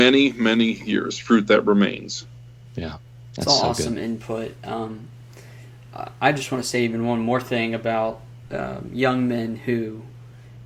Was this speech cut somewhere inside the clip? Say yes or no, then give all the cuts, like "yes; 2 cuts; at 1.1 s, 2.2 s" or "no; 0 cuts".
no; 0 cuts